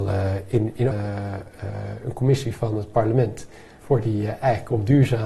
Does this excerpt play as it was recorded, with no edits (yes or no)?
no